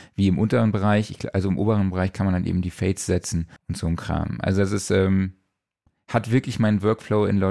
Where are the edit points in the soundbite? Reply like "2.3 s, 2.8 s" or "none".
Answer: 3.6 s